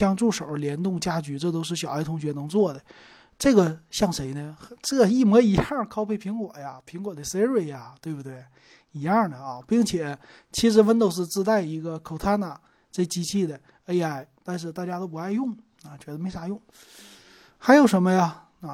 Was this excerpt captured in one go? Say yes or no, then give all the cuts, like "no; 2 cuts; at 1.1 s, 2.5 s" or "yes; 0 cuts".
yes; 0 cuts